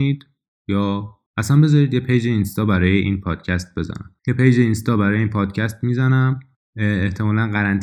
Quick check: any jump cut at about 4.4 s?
no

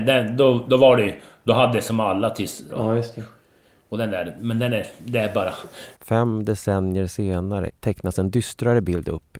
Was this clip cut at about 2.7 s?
yes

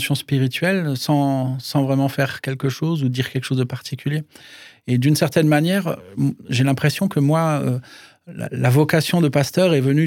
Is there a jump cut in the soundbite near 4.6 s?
no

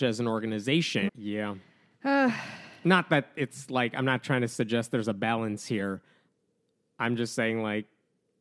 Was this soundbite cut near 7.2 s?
no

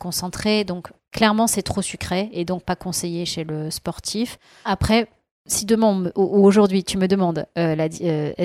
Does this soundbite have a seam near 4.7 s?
yes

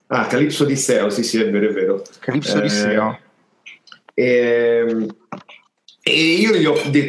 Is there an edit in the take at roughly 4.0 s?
yes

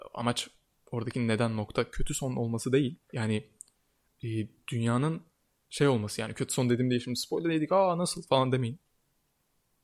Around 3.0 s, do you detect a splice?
yes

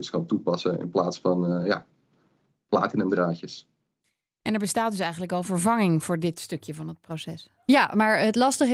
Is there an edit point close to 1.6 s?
no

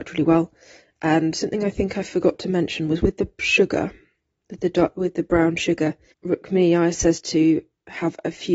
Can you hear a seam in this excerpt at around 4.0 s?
no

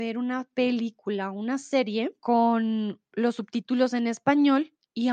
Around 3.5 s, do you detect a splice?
no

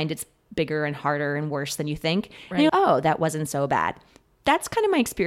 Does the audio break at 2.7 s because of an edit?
yes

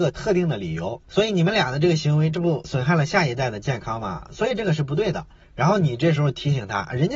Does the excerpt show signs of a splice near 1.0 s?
yes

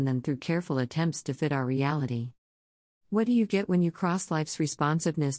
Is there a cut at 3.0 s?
no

